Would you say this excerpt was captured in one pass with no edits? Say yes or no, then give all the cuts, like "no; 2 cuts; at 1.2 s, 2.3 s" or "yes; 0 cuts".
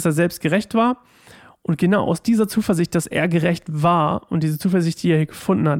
yes; 0 cuts